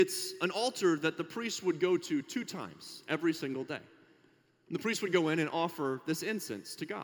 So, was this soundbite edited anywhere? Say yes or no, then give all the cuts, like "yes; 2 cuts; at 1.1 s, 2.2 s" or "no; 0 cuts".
no; 0 cuts